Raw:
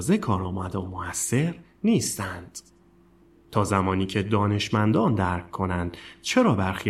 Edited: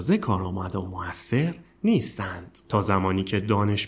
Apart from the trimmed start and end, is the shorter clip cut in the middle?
yes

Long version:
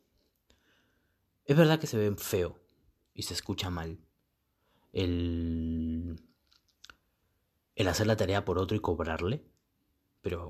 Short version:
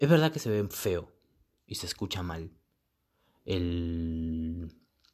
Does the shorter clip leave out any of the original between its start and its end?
no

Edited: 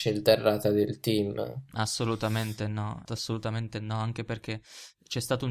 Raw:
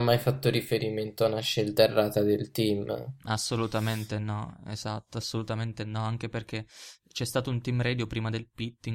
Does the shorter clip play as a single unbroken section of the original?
no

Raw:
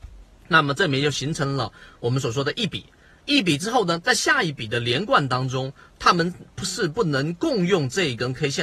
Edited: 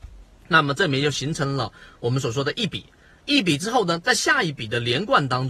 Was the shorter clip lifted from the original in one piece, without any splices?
yes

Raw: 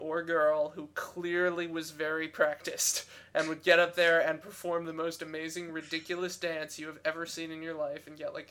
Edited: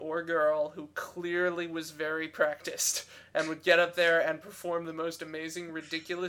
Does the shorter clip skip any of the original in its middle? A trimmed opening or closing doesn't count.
no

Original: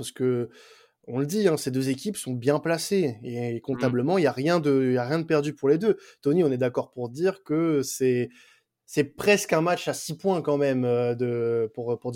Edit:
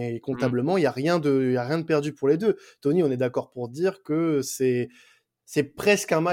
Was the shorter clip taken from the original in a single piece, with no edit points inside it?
yes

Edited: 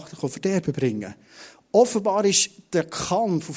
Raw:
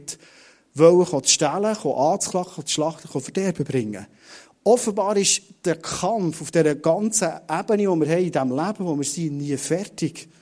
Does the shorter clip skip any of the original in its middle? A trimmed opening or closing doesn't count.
no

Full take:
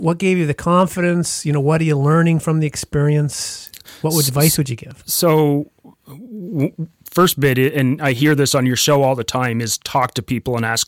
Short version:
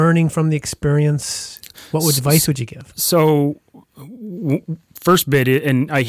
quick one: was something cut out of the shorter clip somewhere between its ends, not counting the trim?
no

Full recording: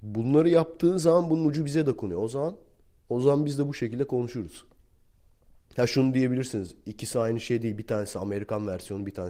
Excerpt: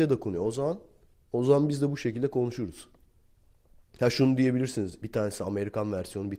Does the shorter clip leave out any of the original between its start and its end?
yes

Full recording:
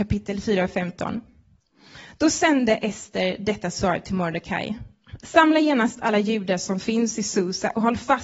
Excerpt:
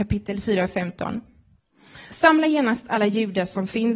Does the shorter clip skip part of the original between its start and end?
yes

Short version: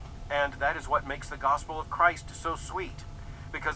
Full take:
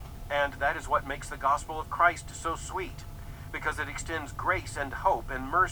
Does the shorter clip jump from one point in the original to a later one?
no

